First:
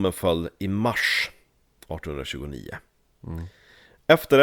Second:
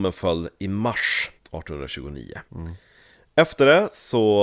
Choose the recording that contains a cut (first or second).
second